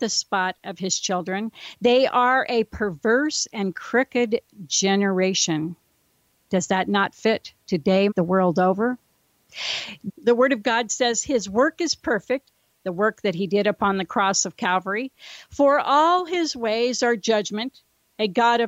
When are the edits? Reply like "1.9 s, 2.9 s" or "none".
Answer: 8.1 s, 10.1 s